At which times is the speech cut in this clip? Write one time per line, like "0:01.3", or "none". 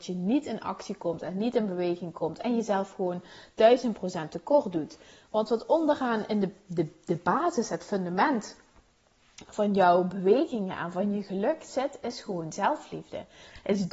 none